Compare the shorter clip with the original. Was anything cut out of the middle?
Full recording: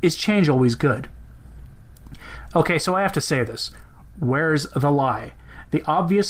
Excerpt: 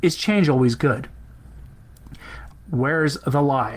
yes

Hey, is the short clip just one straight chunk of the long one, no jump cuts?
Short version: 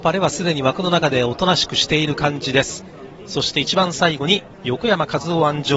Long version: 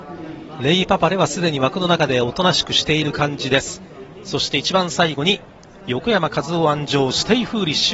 no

